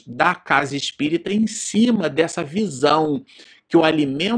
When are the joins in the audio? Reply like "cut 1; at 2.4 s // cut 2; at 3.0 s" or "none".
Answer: none